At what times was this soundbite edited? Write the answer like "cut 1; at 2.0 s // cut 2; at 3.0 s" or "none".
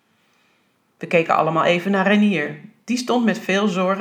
none